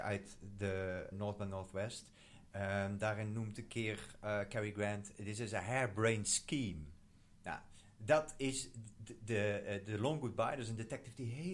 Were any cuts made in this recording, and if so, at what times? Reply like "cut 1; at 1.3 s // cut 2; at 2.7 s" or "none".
cut 1; at 1.1 s